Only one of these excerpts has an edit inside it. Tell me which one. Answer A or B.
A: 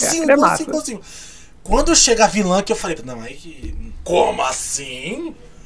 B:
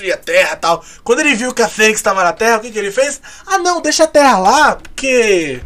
A